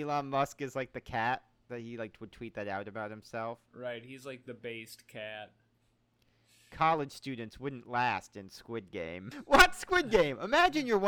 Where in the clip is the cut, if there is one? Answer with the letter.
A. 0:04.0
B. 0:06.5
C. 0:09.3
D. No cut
C